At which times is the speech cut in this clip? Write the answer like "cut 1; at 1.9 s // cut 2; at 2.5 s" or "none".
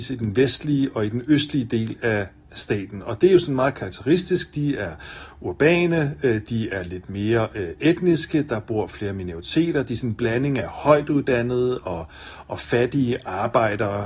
none